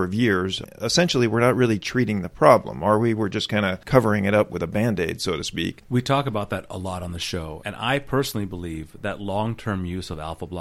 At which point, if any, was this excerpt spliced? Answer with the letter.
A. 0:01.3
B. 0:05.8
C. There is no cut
B